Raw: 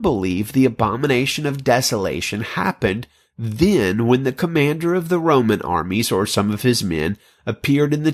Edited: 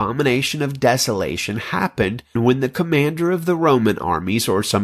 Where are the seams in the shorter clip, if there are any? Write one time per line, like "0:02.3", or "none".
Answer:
0:02.4